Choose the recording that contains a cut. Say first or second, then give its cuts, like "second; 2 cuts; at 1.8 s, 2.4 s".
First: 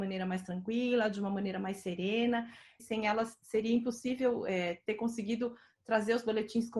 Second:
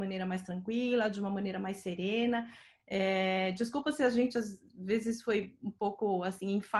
first; 1 cut; at 2.8 s